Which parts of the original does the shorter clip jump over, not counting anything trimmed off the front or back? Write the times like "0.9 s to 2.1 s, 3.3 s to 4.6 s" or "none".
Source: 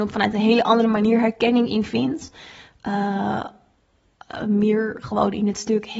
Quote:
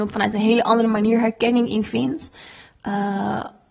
none